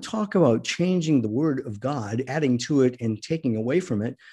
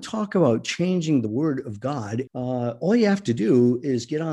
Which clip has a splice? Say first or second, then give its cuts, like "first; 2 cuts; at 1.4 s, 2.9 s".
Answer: second; 1 cut; at 2.3 s